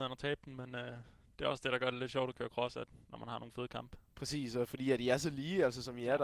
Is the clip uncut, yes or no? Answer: yes